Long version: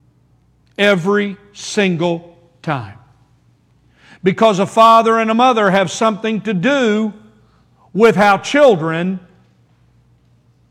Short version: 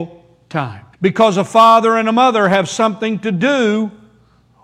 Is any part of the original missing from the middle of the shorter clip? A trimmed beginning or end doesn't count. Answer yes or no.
yes